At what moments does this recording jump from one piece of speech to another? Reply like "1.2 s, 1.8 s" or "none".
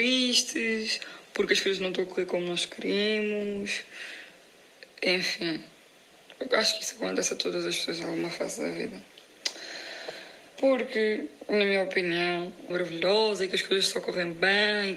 10.5 s, 12.7 s